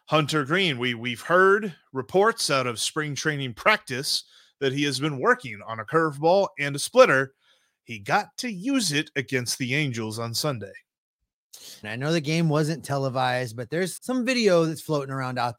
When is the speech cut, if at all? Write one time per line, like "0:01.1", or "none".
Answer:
0:11.8
0:14.0